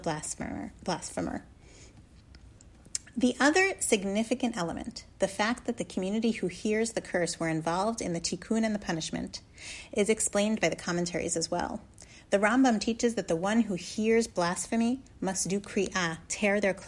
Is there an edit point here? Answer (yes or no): no